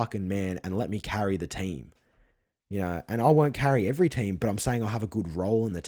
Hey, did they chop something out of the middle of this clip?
no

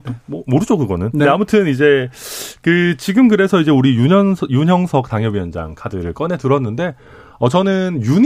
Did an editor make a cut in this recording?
no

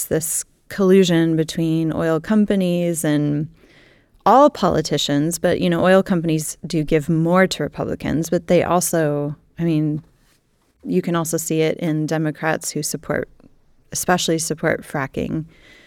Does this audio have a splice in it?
no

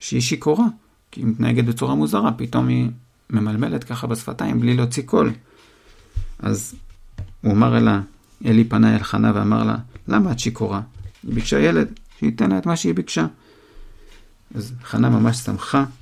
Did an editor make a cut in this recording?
yes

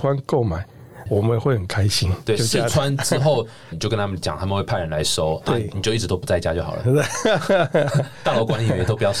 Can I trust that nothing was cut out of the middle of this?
no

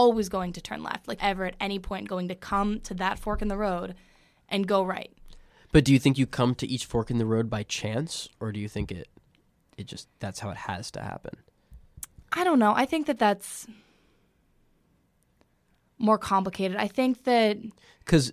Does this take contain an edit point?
yes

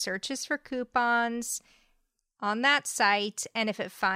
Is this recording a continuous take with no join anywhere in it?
yes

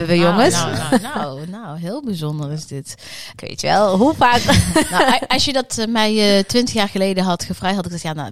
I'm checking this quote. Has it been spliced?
yes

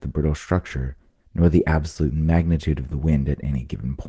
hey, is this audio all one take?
no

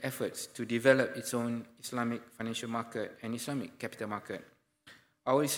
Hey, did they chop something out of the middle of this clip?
no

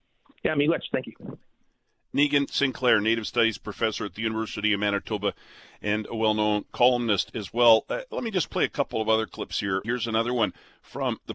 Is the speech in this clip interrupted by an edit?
yes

